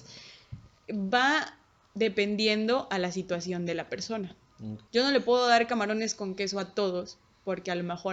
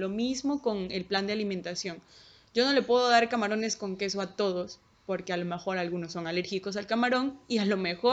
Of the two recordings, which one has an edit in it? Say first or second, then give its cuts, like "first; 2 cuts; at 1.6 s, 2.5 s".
first; 1 cut; at 4.9 s